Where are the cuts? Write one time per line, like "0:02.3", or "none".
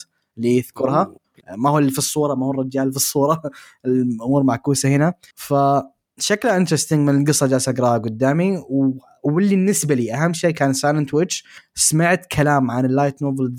0:01.4